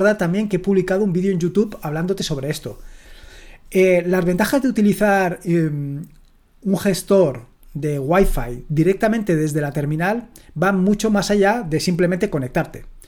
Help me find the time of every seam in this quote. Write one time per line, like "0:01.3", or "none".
none